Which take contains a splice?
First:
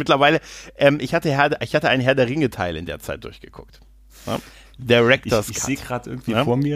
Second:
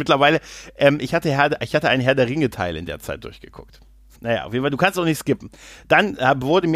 second; 1 cut; at 4.1 s

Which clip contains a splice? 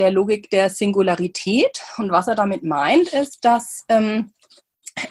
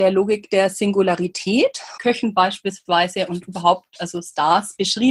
second; 1 cut; at 2.0 s

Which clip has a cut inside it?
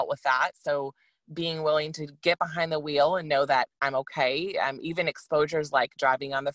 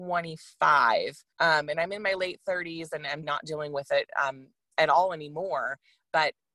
second; 2 cuts; at 1.3 s, 3.2 s

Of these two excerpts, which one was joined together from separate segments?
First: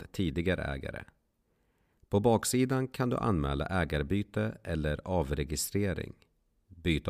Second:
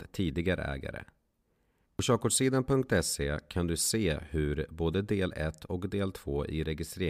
second; 1 cut; at 1.8 s

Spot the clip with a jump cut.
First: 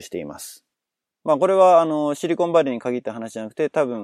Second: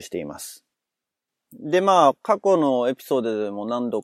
first; 1 cut; at 1.1 s

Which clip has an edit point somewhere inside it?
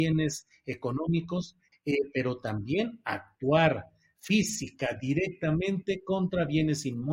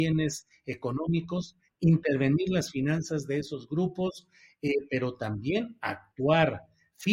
first; 1 cut; at 1.7 s

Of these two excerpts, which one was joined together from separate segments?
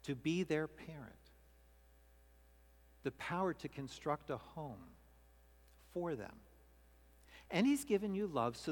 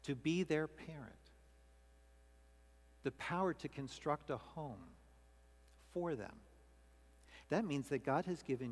second; 1 cut; at 7.4 s

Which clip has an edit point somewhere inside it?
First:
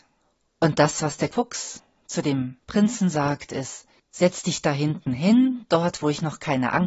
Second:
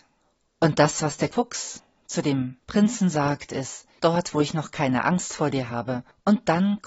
second; 1 cut; at 4.0 s

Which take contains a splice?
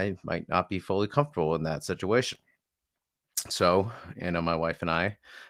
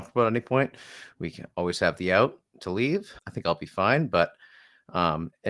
second; 1 cut; at 3.2 s

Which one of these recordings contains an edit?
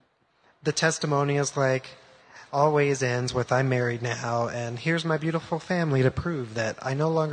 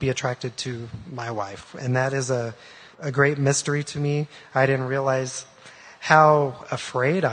second; 1 cut; at 2.9 s

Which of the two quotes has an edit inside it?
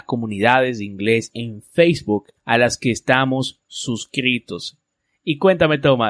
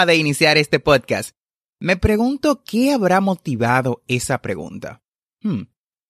first; 1 cut; at 2.4 s

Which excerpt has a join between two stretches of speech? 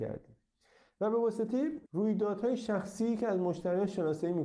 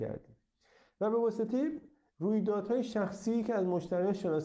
first; 1 cut; at 1.9 s

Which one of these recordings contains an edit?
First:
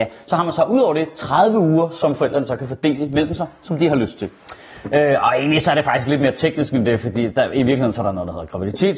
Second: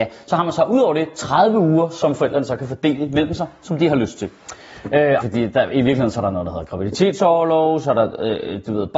second; 1 cut; at 5.2 s

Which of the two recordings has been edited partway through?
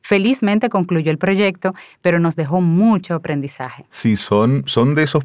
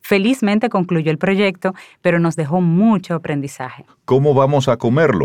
second; 1 cut; at 3.9 s

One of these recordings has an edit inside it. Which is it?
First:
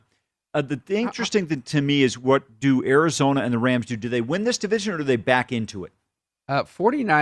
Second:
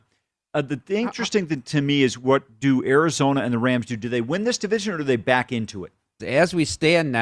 second; 1 cut; at 6.2 s

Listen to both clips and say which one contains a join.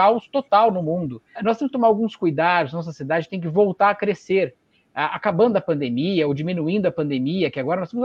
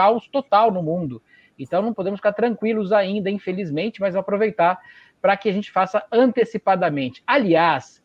first; 1 cut; at 1.4 s

